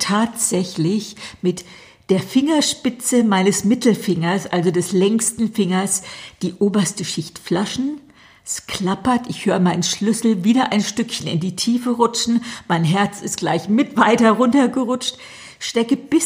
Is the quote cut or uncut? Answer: uncut